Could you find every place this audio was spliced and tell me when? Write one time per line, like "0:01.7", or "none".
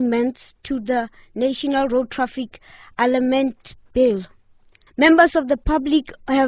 0:04.9